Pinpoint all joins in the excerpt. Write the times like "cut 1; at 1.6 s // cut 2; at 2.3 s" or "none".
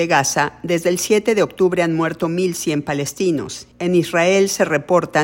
none